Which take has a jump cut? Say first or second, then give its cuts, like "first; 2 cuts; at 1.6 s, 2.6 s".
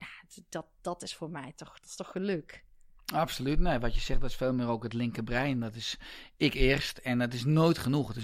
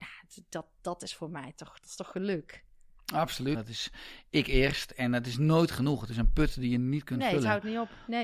second; 1 cut; at 3.5 s